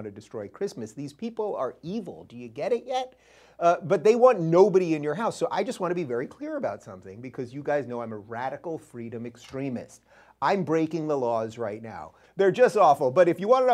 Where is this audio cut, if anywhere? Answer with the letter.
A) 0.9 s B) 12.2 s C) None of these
B